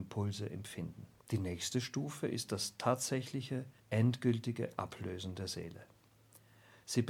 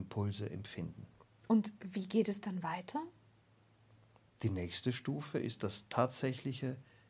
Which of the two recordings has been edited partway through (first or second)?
first